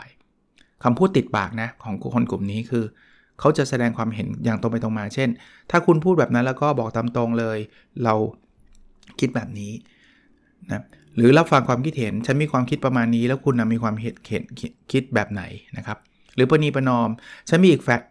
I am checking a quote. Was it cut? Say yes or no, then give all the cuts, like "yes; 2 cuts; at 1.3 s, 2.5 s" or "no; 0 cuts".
no; 0 cuts